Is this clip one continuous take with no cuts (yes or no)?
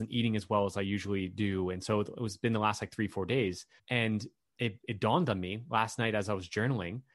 no